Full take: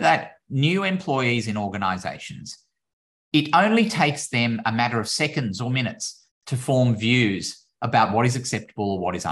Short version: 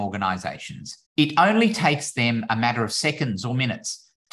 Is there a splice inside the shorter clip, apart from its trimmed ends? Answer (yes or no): yes